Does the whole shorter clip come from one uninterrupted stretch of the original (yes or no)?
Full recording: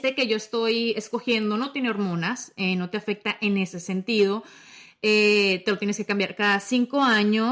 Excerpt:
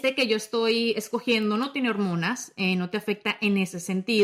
yes